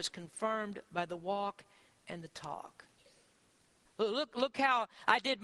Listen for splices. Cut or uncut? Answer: cut